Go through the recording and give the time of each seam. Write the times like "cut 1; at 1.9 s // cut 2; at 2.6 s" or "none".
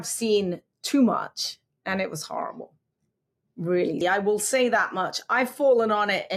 cut 1; at 4.0 s